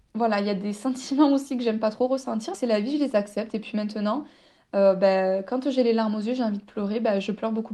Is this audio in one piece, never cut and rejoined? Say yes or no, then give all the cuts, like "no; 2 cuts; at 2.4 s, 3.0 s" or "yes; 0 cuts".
no; 1 cut; at 2.5 s